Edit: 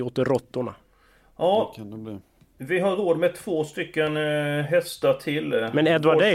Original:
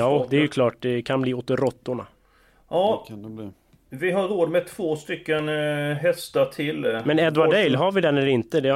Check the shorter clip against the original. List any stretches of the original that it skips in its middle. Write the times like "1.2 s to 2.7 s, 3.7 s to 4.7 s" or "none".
none